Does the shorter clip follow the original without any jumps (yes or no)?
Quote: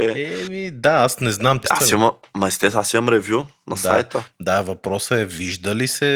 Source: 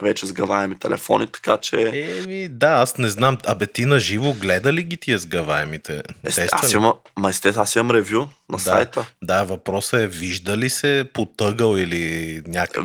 no